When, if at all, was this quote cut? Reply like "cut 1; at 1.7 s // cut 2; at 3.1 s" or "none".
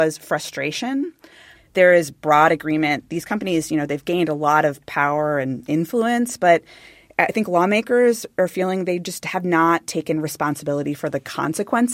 cut 1; at 1.5 s